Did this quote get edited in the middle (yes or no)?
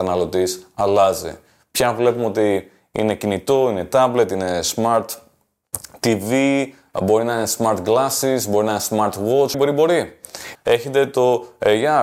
yes